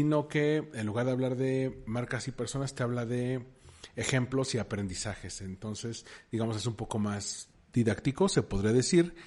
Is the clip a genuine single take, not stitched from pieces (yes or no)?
yes